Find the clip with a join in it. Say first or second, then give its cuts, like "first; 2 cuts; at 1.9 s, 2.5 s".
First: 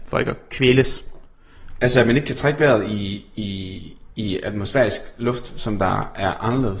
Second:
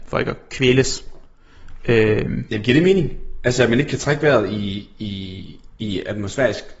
first; 1 cut; at 1.8 s